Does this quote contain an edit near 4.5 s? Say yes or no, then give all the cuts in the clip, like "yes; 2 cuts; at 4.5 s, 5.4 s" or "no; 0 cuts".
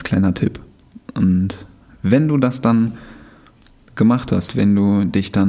yes; 1 cut; at 4.5 s